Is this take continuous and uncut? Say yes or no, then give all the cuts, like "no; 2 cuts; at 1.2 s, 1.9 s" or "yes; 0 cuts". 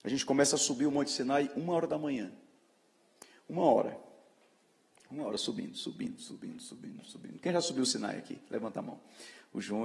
yes; 0 cuts